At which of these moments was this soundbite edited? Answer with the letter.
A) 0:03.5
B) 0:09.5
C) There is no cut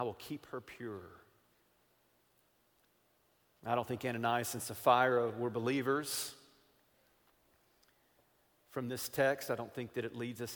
C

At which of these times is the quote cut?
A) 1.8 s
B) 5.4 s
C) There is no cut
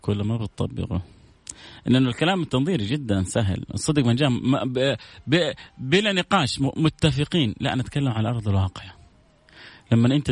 C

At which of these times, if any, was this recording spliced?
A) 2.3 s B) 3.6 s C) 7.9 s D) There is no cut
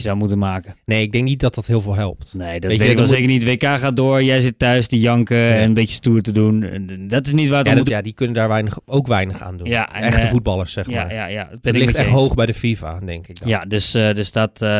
C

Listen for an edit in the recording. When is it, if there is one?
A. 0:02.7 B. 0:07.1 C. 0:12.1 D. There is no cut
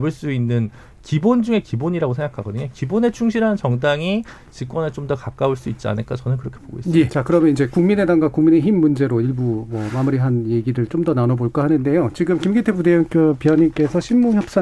B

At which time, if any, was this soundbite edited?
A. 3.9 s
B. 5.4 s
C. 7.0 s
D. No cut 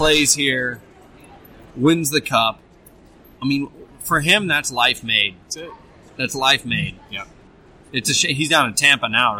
A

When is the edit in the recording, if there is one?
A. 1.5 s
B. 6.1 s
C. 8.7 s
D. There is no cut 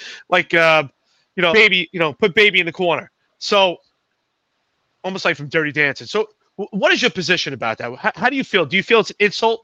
A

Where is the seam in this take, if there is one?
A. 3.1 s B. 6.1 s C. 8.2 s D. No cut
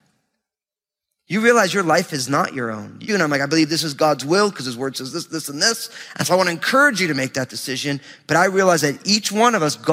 A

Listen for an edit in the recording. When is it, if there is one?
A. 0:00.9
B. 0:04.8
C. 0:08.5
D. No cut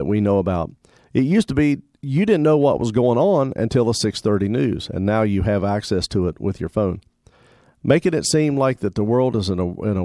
D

